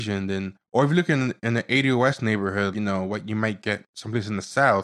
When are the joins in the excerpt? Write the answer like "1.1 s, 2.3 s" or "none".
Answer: 2.7 s